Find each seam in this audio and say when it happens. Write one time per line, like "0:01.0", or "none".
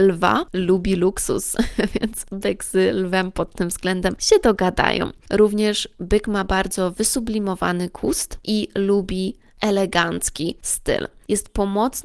none